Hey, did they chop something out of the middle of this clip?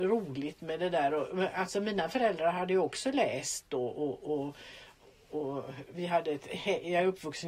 yes; 1 cut; at 3.9 s

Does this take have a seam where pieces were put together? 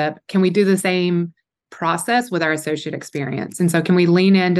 no; 0 cuts

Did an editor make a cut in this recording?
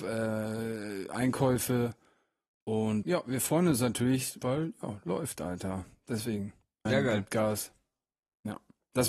yes; 3 cuts; at 3.0 s, 4.4 s, 6.9 s

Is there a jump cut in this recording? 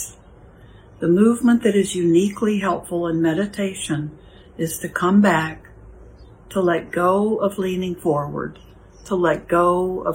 yes; 1 cut; at 6.3 s

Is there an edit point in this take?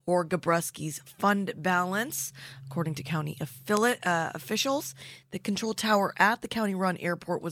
no; 0 cuts

